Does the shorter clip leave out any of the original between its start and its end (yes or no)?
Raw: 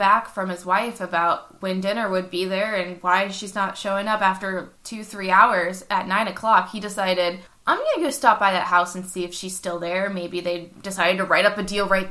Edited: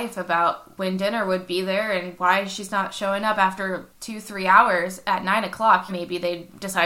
yes